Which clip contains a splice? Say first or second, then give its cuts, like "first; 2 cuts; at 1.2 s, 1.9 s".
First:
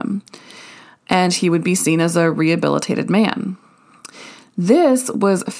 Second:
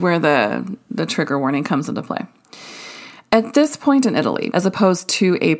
second; 1 cut; at 4.5 s